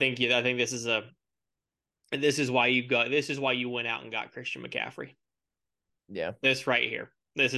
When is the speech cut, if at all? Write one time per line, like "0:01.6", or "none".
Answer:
none